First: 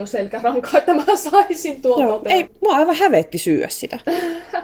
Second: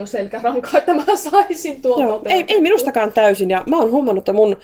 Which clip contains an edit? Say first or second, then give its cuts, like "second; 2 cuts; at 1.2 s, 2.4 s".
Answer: first; 1 cut; at 2.5 s